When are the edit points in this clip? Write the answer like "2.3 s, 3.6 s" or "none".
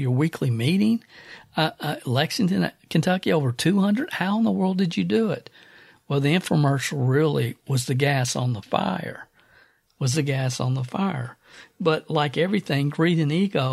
none